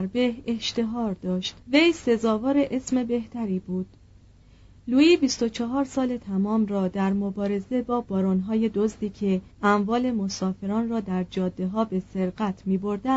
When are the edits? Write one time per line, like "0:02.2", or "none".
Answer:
0:01.6
0:09.5